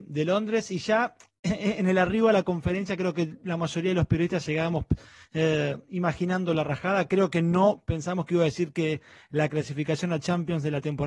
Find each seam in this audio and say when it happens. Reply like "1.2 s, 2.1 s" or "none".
none